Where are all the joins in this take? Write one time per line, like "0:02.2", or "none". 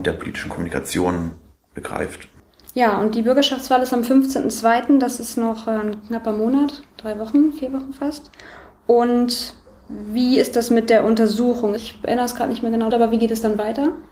0:11.8
0:12.9